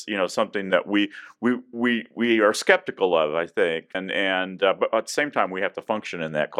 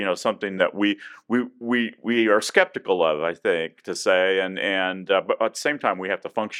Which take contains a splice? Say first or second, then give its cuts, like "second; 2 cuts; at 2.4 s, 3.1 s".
first; 1 cut; at 3.9 s